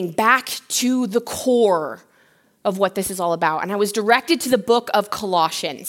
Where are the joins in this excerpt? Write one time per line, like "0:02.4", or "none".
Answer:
none